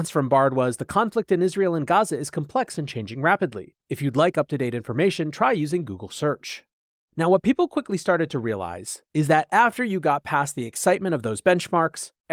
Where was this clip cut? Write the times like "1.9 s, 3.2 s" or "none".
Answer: none